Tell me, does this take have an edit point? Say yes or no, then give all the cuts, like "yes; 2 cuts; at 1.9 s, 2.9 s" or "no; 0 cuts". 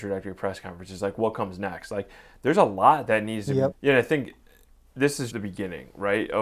yes; 2 cuts; at 3.7 s, 5.3 s